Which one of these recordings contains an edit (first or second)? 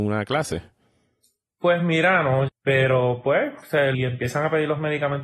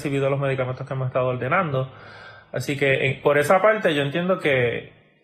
first